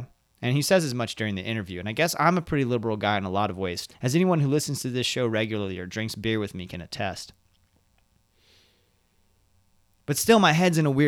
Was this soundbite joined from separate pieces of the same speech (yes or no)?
yes